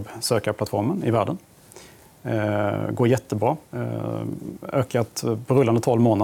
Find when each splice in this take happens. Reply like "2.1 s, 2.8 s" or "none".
3.7 s